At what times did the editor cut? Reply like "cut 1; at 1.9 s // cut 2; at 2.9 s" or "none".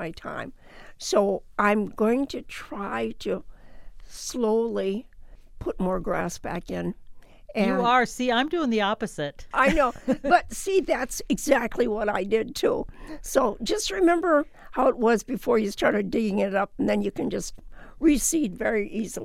cut 1; at 9.5 s